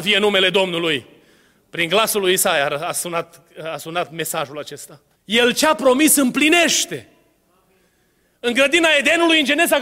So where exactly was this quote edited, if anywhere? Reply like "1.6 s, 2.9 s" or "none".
5.1 s